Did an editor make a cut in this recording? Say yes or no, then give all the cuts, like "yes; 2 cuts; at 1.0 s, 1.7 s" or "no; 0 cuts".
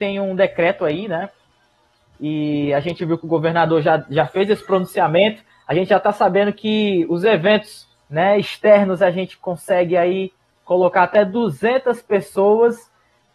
no; 0 cuts